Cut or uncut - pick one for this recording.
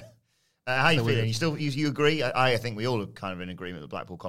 uncut